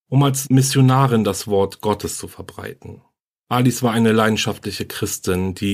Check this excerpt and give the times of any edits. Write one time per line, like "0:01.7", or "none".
none